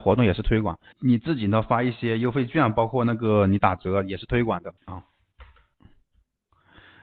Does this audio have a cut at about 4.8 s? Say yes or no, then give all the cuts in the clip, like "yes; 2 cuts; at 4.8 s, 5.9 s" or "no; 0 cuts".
yes; 2 cuts; at 0.9 s, 4.8 s